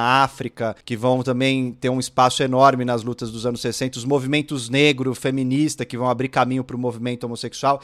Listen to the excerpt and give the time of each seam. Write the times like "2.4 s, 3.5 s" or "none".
none

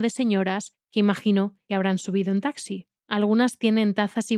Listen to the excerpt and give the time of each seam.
3.0 s

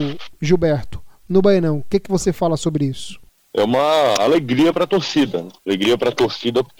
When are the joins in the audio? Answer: 5.6 s

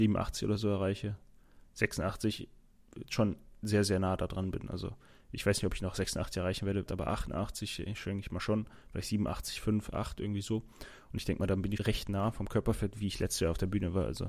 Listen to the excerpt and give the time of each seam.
6.9 s, 11.8 s

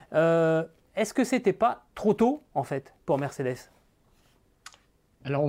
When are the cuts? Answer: none

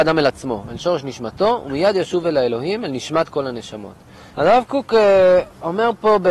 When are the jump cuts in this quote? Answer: 4.3 s

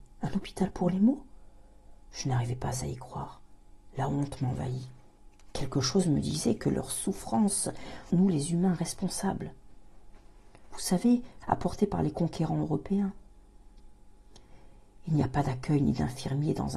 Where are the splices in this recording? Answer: 8.1 s, 11.4 s

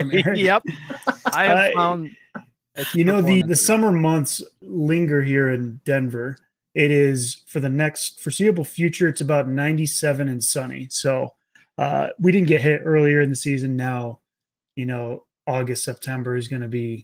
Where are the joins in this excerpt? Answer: 3.4 s

